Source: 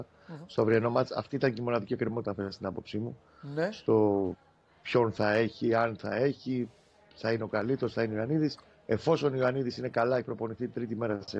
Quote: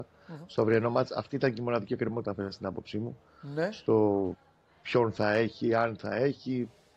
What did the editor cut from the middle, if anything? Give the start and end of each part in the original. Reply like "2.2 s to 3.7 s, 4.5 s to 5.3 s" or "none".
none